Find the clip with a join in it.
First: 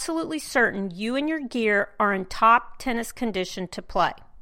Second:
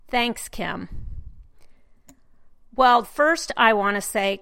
second; 1 cut; at 3.0 s

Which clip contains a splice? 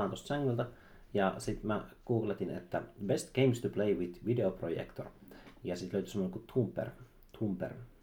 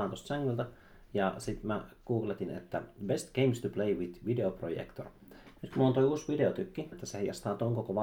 second; 2 cuts; at 5.6 s, 6.9 s

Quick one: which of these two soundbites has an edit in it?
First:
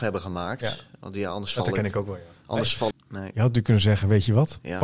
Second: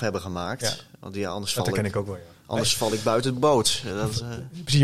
first; 1 cut; at 2.9 s

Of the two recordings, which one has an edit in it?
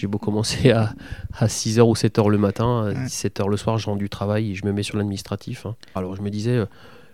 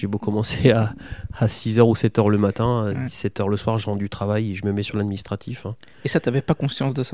first; 1 cut; at 6.0 s

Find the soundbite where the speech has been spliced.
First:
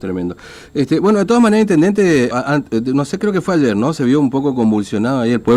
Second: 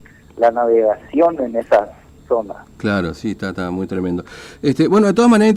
first; 1 cut; at 2.3 s

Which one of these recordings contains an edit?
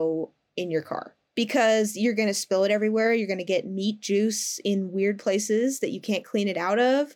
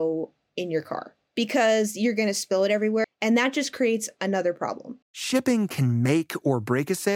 second; 2 cuts; at 3.0 s, 5.0 s

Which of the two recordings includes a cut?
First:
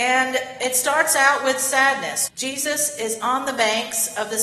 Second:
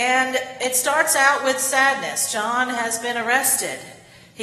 first; 1 cut; at 2.3 s

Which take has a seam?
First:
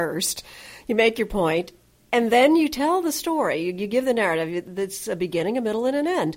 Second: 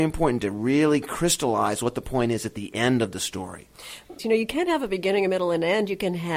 second; 1 cut; at 4.2 s

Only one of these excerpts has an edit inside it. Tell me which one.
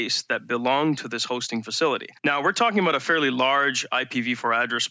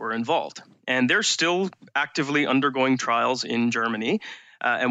first; 1 cut; at 2.2 s

